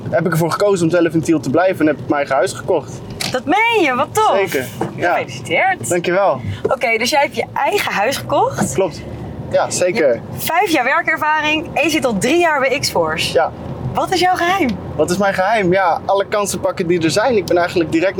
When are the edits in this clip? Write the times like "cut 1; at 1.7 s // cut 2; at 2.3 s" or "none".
cut 1; at 9.5 s